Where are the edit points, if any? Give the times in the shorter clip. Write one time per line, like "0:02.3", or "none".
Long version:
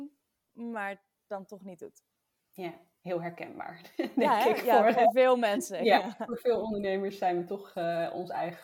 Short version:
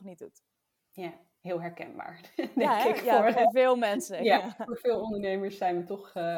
none